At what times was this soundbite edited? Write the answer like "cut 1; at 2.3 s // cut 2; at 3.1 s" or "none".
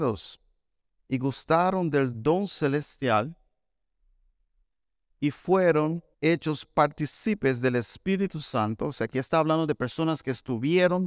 cut 1; at 6.1 s